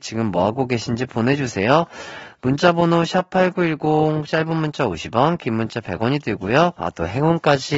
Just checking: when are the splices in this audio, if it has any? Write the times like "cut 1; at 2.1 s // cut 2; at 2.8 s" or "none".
cut 1; at 6.8 s